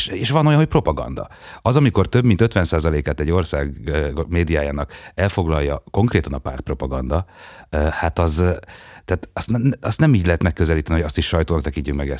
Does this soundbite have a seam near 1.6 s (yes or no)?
no